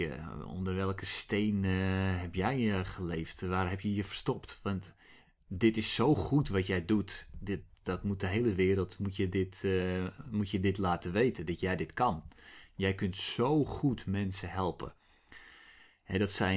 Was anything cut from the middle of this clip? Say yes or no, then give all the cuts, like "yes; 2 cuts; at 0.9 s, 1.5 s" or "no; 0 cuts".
no; 0 cuts